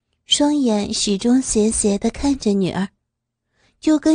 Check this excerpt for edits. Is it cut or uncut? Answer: uncut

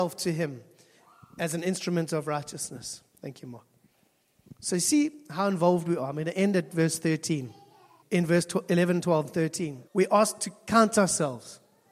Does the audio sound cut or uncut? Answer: cut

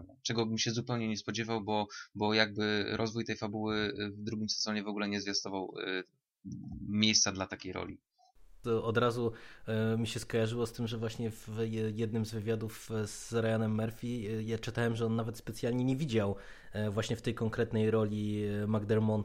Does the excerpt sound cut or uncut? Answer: uncut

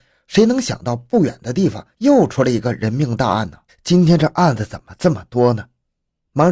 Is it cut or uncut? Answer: cut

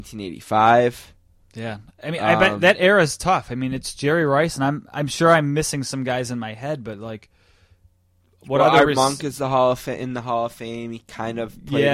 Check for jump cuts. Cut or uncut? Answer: uncut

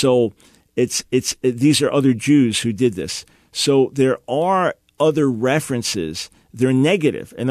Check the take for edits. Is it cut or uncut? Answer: uncut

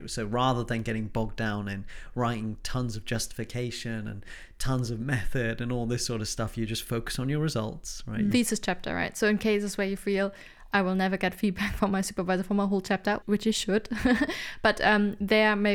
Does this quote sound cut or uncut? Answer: cut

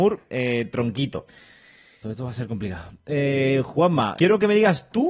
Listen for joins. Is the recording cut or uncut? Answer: cut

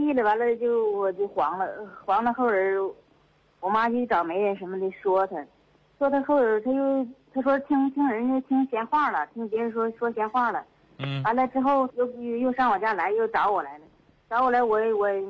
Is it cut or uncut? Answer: cut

